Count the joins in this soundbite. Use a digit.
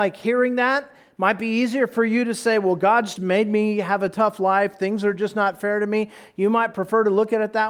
1